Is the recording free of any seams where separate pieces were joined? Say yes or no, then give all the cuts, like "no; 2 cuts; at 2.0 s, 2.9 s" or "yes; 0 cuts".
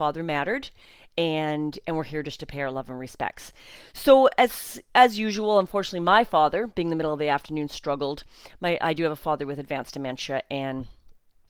yes; 0 cuts